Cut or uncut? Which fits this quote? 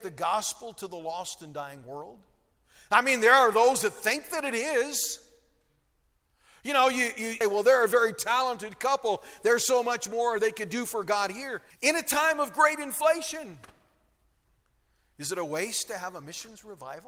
cut